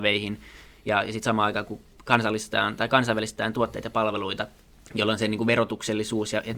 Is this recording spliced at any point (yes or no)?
no